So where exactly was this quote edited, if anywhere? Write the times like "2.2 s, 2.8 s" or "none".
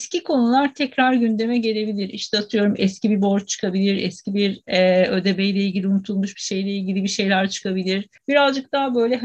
8.2 s